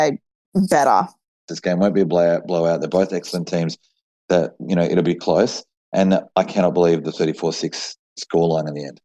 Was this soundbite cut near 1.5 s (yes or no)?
yes